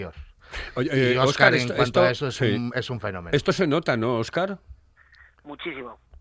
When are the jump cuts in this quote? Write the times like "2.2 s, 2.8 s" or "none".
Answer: none